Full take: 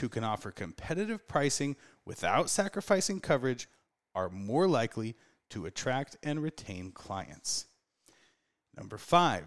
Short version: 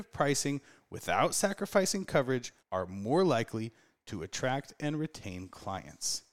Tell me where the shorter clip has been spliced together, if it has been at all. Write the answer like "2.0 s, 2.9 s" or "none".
2.6 s